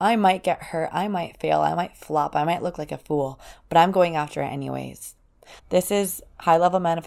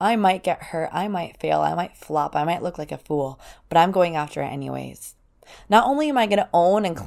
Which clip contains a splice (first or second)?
first